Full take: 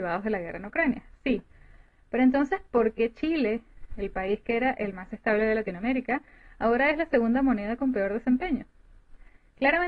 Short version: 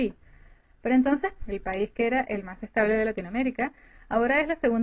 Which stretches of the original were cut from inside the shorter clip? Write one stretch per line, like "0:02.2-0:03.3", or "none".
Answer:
0:02.7-0:03.9